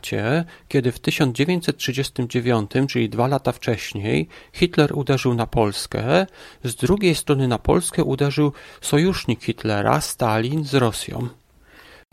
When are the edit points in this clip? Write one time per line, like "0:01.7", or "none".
none